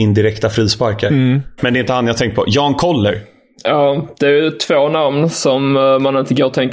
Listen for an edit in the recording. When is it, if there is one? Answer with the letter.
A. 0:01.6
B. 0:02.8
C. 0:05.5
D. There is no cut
A